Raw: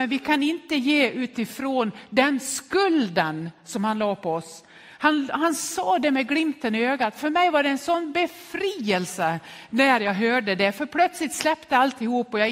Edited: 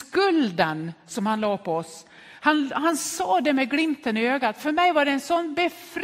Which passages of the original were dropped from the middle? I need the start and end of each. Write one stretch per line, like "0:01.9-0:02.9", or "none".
none